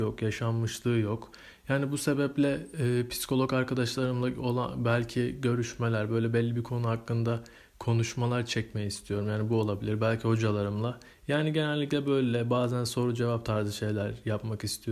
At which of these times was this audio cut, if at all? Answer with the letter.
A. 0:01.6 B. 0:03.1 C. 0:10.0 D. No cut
D